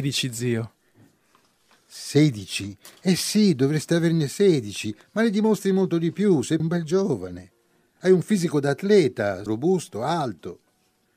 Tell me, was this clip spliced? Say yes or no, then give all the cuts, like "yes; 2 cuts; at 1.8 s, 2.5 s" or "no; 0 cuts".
yes; 2 cuts; at 6.6 s, 9.5 s